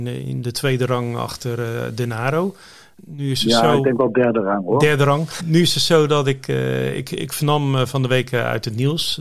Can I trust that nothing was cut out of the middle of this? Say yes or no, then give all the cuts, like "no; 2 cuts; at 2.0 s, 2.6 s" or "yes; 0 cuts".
no; 1 cut; at 5.4 s